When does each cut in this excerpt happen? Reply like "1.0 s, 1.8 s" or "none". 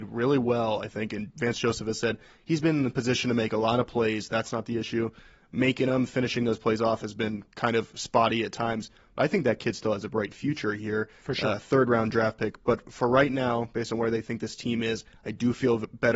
none

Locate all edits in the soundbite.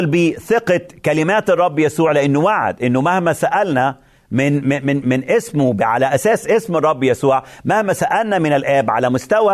5.0 s

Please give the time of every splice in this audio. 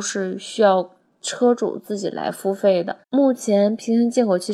3.0 s

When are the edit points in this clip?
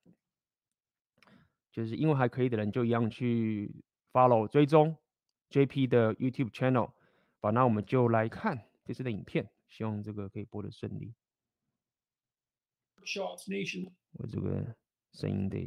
8.3 s, 14.1 s

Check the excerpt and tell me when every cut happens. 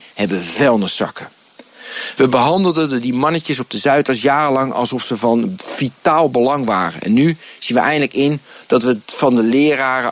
none

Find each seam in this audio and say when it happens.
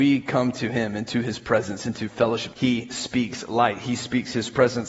2.5 s

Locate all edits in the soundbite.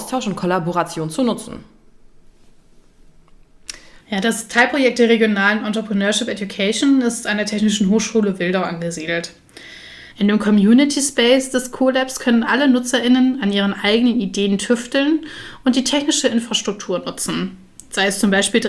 4.0 s, 10.1 s

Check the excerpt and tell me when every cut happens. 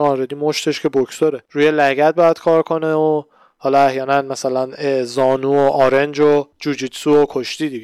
1.5 s, 6.5 s

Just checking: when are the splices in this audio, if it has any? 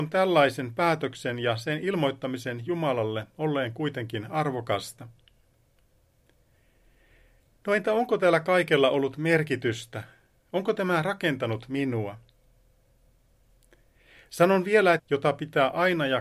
15.0 s

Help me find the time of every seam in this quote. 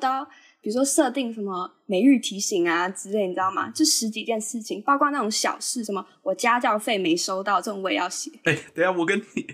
none

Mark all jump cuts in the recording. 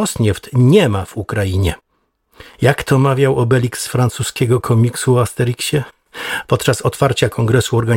6.4 s

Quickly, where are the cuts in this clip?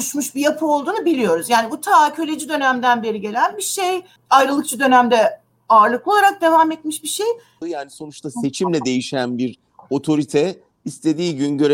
4.2 s, 7.6 s

